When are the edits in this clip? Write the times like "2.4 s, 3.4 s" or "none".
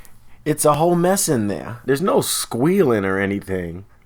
1.9 s